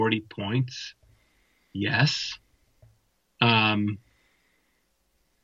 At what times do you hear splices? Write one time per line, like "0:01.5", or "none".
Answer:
none